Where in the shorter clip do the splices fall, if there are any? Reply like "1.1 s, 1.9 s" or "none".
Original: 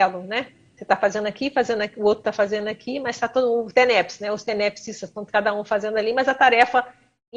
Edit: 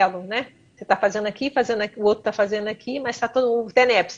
none

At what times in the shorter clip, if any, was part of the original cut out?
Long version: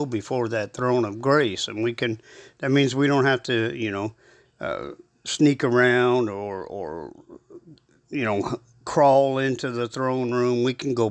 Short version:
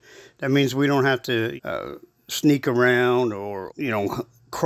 1.6 s, 3.7 s

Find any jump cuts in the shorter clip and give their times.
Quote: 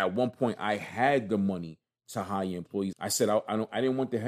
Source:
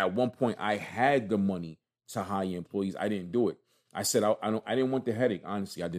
2.9 s

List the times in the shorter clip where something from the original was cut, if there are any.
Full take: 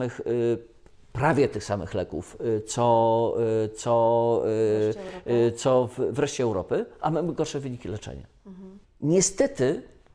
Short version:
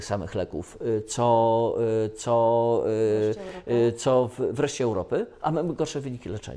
none

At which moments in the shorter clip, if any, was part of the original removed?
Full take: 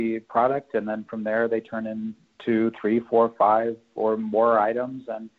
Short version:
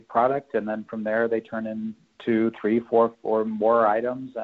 3.1 s

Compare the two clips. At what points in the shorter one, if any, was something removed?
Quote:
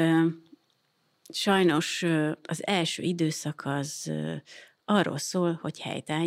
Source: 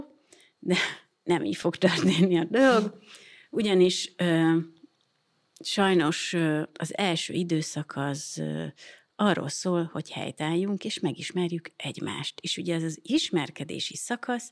none

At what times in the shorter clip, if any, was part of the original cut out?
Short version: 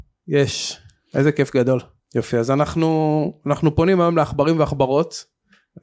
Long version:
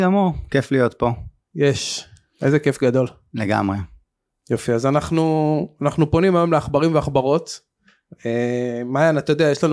2.0 s

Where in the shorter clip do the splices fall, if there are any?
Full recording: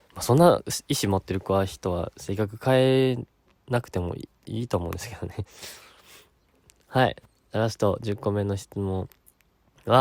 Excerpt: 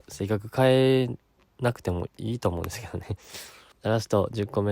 2.1 s, 3.7 s

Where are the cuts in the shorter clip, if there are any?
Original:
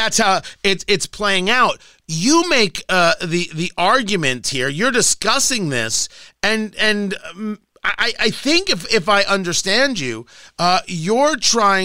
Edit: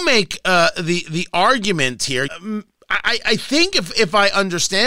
2.3 s

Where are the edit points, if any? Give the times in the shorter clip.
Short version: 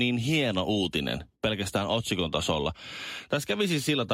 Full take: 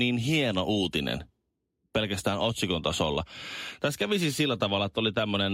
1.3 s

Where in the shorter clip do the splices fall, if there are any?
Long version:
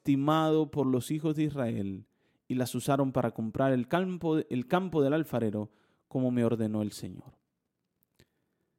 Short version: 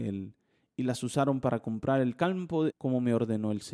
2.7 s

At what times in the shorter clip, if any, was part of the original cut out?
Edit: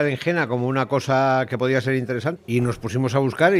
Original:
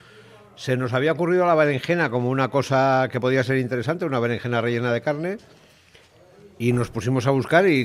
2.4 s

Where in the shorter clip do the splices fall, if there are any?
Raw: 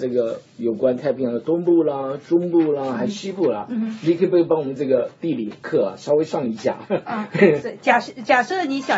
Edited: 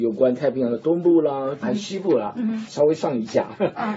1.6 s, 2.7 s

